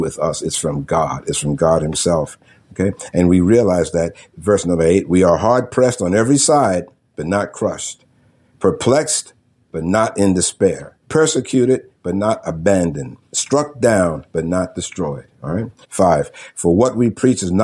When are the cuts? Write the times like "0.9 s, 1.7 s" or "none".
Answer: 11.0 s, 13.2 s, 15.8 s